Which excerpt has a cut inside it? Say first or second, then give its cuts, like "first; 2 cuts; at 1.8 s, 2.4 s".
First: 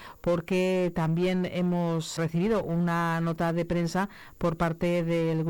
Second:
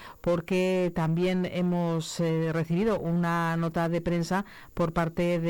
first; 1 cut; at 2.2 s